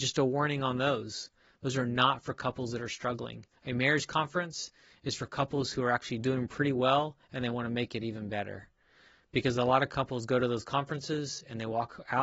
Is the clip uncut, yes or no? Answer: yes